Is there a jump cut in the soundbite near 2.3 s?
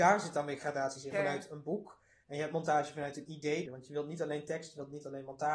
no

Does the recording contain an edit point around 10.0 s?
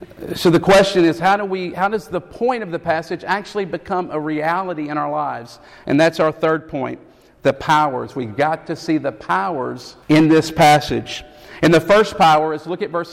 yes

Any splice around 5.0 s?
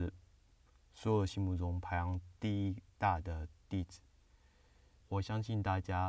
yes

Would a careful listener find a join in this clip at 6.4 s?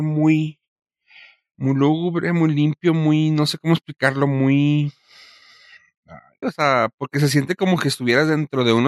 yes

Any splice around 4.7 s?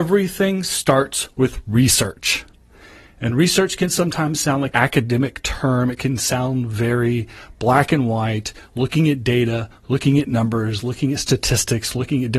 yes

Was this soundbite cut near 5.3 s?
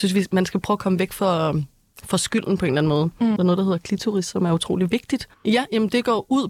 yes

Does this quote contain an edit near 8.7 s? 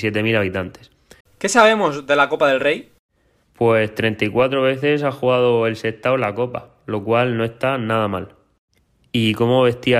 no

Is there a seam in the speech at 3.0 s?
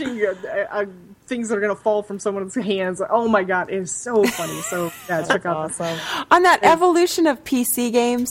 no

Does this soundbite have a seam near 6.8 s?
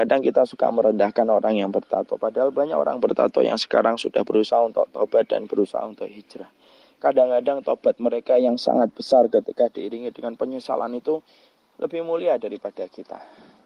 no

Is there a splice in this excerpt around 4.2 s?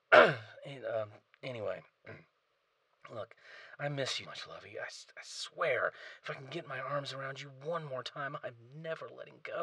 yes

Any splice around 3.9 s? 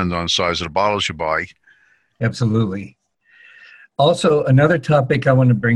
no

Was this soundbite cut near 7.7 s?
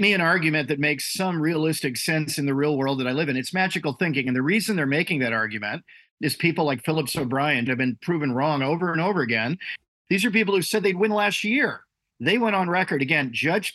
yes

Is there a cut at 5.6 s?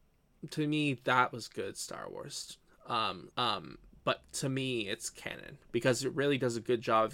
yes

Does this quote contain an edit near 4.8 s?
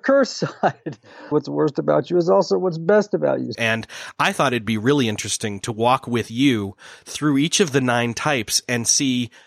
no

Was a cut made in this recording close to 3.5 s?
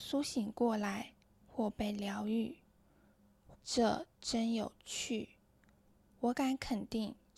yes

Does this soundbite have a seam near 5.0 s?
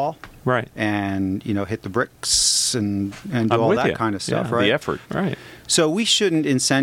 yes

